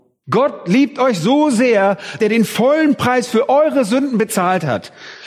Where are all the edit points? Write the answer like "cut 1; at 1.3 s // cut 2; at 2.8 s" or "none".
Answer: cut 1; at 2.2 s